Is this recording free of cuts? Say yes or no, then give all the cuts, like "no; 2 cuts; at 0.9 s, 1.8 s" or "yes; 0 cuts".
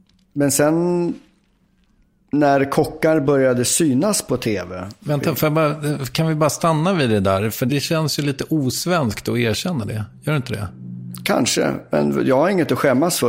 yes; 0 cuts